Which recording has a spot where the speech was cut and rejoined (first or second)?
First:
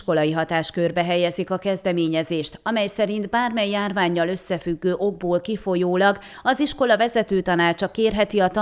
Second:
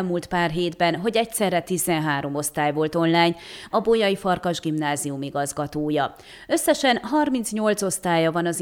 second